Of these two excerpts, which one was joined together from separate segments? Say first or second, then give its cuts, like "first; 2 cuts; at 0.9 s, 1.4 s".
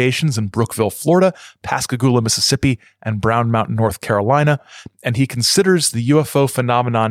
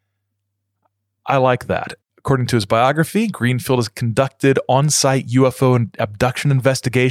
second; 1 cut; at 2.0 s